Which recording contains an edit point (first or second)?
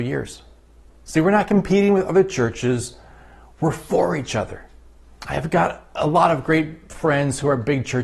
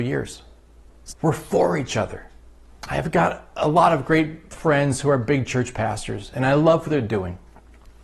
second